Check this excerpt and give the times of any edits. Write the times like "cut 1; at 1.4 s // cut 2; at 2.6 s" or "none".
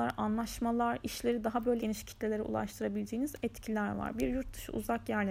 cut 1; at 1.8 s